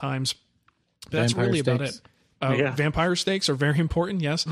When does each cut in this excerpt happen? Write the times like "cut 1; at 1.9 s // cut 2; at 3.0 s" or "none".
none